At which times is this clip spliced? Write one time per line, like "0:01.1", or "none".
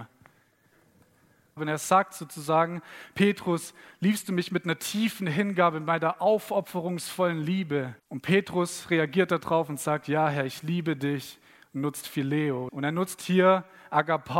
0:01.6
0:08.0
0:12.7